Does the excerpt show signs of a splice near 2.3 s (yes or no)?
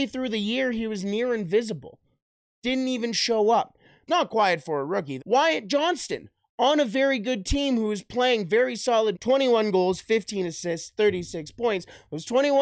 no